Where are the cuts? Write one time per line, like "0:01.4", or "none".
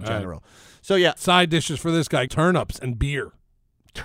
0:01.2
0:02.3